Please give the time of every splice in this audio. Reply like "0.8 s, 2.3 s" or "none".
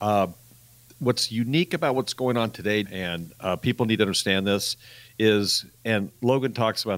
2.8 s